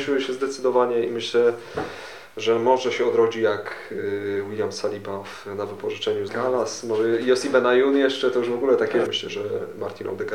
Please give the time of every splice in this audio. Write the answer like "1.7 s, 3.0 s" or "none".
6.3 s, 9.1 s